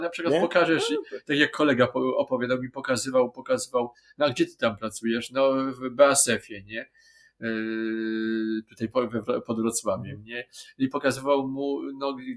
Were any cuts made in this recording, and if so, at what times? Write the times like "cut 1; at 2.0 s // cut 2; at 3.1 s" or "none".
none